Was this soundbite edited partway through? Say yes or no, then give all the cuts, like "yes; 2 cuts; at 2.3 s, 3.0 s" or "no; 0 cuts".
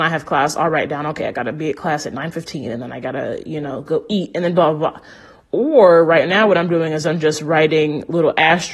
no; 0 cuts